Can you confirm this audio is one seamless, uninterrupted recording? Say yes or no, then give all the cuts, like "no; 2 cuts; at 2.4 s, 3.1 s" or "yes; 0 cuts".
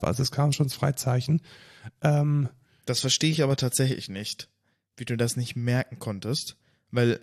yes; 0 cuts